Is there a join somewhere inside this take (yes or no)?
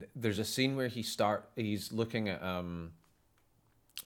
no